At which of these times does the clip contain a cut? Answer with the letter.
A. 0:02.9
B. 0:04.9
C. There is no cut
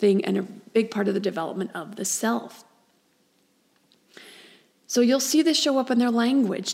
C